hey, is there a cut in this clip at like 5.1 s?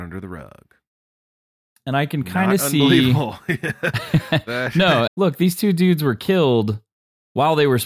yes; 1 cut; at 5.1 s

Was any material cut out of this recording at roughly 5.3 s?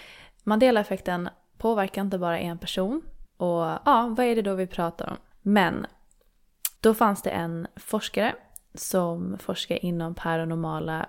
yes; 3 cuts; at 3.3 s, 5.3 s, 6.8 s

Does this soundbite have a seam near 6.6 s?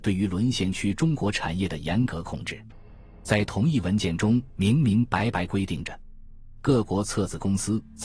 no; 0 cuts

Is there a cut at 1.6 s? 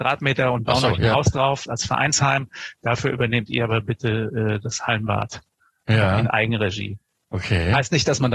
yes; 1 cut; at 1.6 s

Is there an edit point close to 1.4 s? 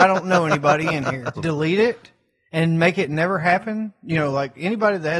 yes; 1 cut; at 1.4 s

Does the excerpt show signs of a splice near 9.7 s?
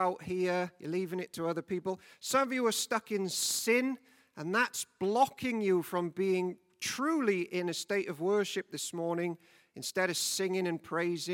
no; 0 cuts

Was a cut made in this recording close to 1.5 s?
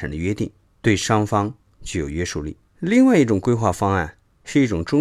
no; 1 cut; at 2.7 s

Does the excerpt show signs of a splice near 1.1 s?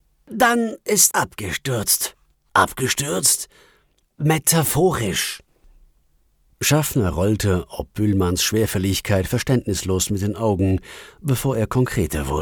yes; 1 cut; at 1.1 s

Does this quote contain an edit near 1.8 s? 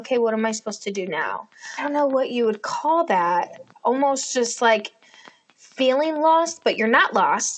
yes; 1 cut; at 1.8 s

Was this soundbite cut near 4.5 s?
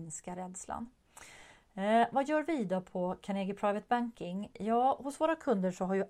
no; 0 cuts

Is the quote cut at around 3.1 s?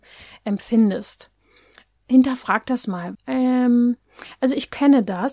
yes; 2 cuts; at 2.0 s, 3.1 s

